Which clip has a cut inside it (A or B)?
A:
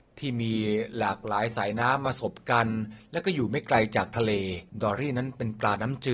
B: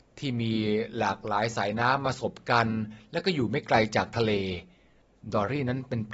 A